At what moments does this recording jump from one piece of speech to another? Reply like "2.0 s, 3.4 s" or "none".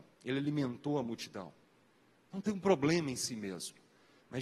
none